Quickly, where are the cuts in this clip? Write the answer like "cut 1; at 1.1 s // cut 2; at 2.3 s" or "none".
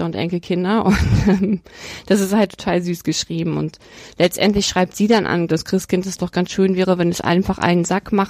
cut 1; at 5.5 s